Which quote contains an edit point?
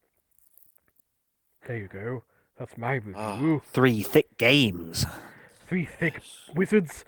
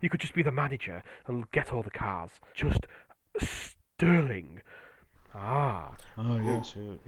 second; 2 cuts; at 2.5 s, 5.1 s

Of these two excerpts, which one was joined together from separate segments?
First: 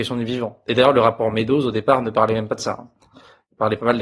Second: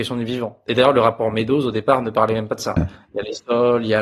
second; 1 cut; at 2.8 s

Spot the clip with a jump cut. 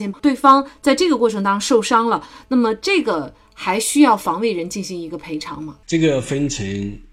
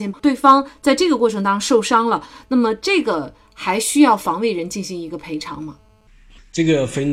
first; 1 cut; at 5.8 s

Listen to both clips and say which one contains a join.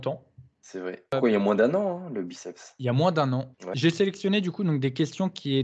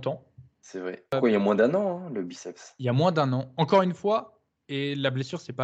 first; 1 cut; at 3.5 s

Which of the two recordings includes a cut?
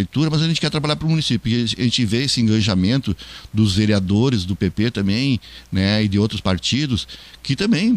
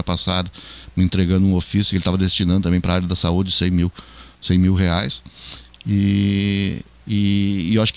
second; 1 cut; at 7.0 s

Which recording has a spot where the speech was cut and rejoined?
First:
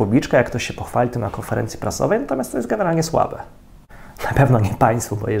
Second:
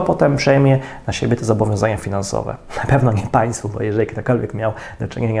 first; 1 cut; at 4.2 s

